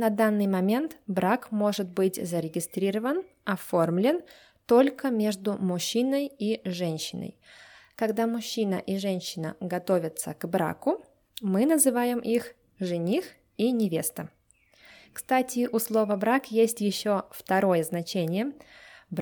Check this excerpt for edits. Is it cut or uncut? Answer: uncut